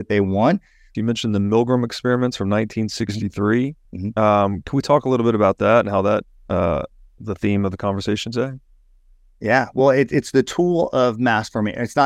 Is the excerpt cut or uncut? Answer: cut